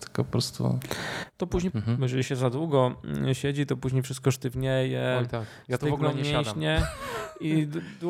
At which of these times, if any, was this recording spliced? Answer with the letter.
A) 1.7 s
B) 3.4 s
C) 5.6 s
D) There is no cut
A